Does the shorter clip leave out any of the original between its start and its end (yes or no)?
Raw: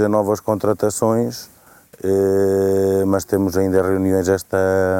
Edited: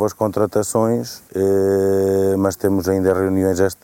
yes